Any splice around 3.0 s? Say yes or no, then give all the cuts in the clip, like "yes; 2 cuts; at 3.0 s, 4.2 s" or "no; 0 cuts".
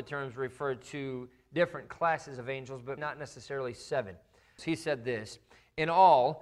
yes; 2 cuts; at 3.0 s, 4.6 s